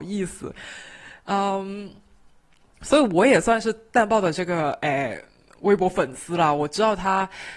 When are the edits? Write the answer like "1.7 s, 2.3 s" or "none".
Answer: none